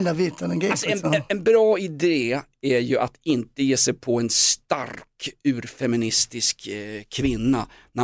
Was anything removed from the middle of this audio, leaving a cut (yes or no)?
no